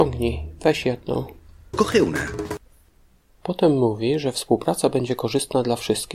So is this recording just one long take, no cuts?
yes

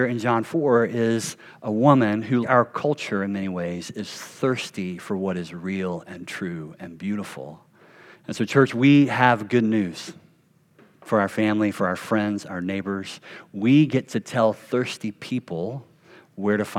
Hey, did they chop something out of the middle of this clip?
yes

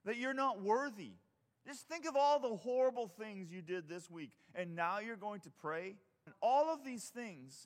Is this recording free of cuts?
no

